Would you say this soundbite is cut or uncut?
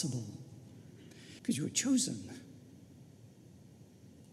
cut